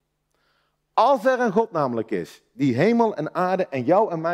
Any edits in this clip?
no; 0 cuts

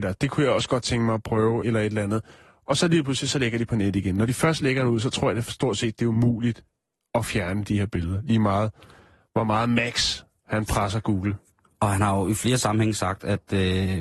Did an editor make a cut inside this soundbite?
yes; 1 cut; at 1.6 s

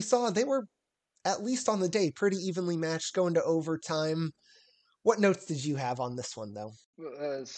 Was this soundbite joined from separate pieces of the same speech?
no; 0 cuts

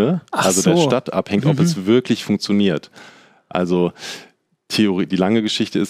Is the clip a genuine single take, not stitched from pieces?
yes; 0 cuts

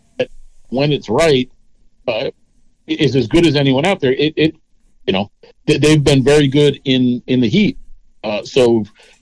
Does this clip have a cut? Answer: no; 0 cuts

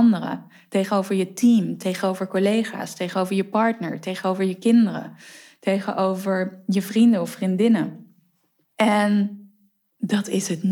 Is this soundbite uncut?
yes; 0 cuts

